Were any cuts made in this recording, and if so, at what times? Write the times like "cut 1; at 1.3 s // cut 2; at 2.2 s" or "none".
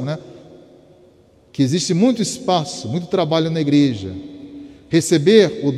none